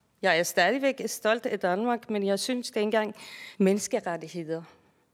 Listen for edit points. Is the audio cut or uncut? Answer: cut